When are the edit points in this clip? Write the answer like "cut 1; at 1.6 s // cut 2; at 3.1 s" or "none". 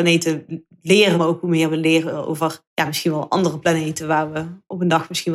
cut 1; at 1.1 s // cut 2; at 2.7 s